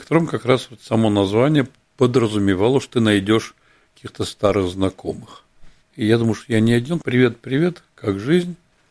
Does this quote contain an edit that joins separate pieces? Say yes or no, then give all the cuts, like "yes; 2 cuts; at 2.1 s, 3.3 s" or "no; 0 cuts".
yes; 2 cuts; at 5.8 s, 7.0 s